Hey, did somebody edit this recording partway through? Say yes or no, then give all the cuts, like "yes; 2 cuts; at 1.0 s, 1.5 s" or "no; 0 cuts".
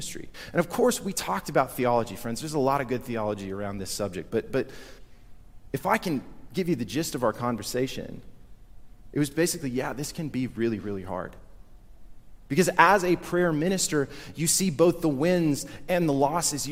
no; 0 cuts